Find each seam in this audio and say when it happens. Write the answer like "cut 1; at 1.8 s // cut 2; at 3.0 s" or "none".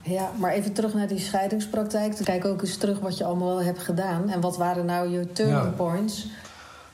cut 1; at 2.2 s